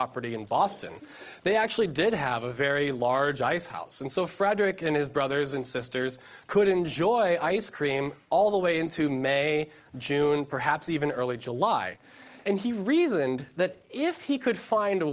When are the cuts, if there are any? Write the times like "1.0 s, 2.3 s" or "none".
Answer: 12.4 s